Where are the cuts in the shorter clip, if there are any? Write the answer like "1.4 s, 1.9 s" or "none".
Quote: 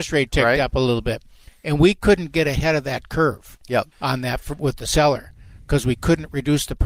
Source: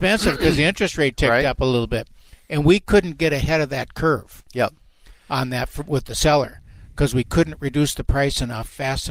3.9 s